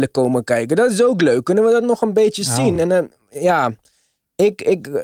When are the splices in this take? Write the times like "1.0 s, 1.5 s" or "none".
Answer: none